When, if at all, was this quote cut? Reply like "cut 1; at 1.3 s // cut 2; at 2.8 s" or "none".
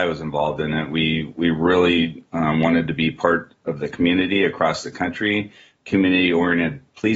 none